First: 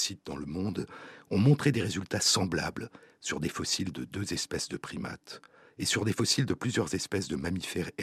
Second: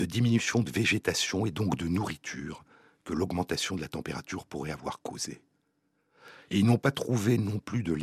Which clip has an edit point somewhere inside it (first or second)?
second